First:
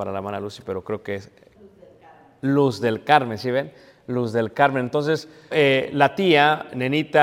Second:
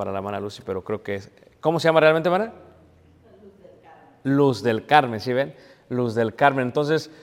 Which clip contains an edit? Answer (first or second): first